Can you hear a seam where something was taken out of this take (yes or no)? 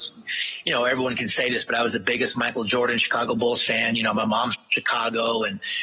no